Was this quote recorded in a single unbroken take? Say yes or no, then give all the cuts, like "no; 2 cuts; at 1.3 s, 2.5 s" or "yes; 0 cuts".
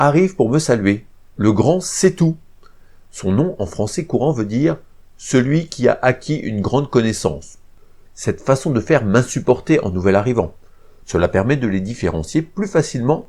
no; 2 cuts; at 8.1 s, 11.0 s